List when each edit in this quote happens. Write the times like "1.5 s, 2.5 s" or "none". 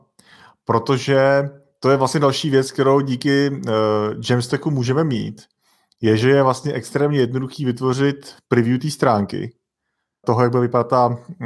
10.2 s